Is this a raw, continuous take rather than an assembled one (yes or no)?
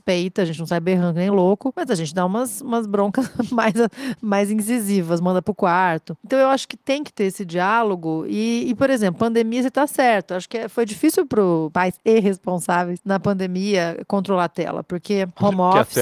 yes